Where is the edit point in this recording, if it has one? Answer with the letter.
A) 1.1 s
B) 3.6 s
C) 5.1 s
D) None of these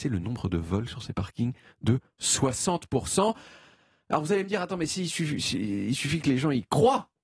D